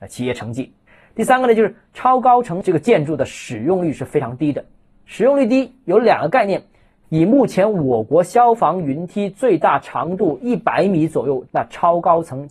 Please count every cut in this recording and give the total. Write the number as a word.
two